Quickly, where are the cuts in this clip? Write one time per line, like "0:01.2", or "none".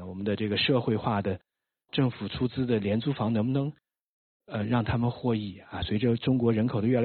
none